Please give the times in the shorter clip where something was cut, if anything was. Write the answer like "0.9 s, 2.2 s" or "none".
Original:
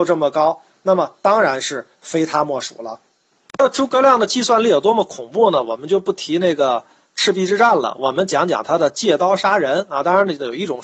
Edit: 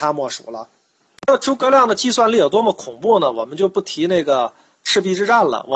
none